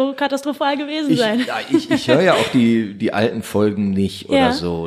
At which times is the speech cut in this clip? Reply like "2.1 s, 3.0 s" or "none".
none